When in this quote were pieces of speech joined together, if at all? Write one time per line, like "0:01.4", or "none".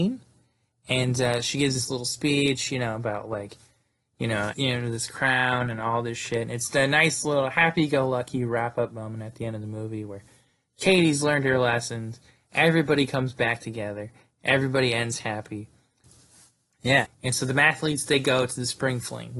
0:04.5
0:16.0
0:17.1